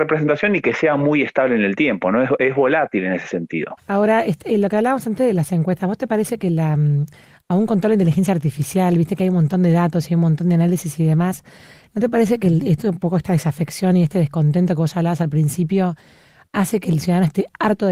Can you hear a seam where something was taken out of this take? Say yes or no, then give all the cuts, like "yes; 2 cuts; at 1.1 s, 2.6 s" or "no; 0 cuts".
yes; 1 cut; at 3.8 s